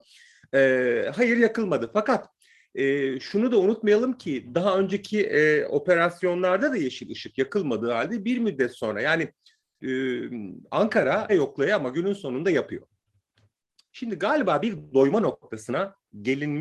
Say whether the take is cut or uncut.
cut